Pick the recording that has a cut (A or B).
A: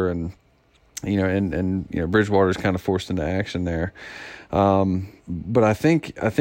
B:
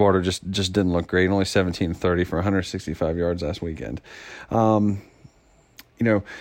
A